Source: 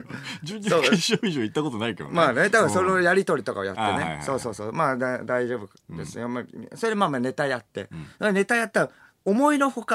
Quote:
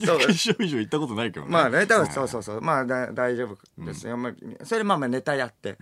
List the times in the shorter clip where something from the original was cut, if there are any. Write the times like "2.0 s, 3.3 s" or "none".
2.0 s